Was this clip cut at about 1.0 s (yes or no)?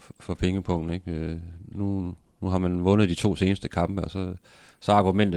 no